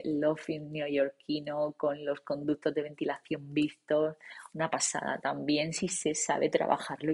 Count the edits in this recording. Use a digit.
0